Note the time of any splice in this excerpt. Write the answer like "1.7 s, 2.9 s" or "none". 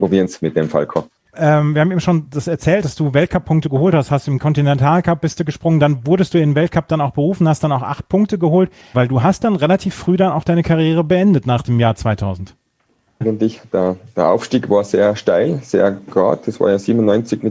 8.9 s, 13.2 s